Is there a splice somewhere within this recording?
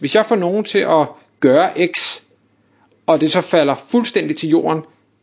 no; 0 cuts

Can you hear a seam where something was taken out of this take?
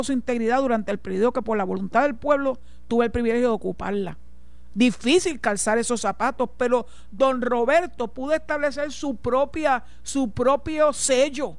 yes; 1 cut; at 4.7 s

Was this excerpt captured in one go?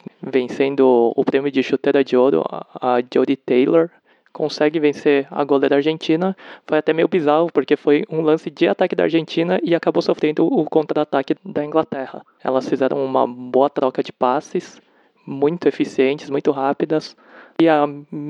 yes; 0 cuts

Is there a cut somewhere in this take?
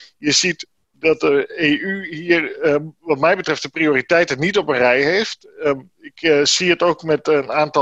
no; 0 cuts

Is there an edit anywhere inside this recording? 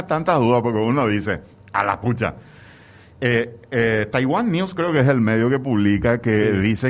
no; 0 cuts

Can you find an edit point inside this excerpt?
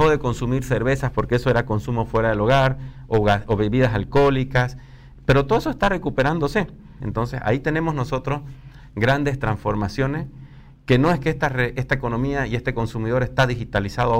yes; 1 cut; at 7.0 s

